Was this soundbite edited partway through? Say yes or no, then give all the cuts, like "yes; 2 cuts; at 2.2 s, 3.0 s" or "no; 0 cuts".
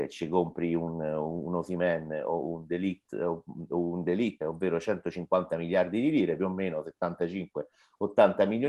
yes; 1 cut; at 4.4 s